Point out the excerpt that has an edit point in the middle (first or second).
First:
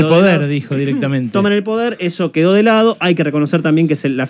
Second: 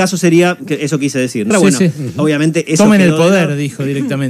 second